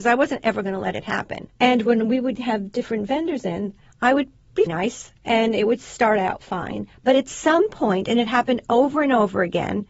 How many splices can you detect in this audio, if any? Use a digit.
2